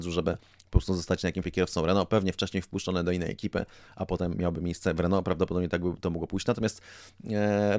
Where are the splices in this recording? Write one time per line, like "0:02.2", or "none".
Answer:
0:01.4